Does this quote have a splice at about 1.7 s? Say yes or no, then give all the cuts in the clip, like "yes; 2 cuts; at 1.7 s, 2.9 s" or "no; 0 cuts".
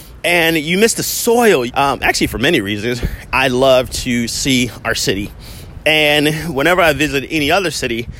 yes; 2 cuts; at 1.7 s, 3.3 s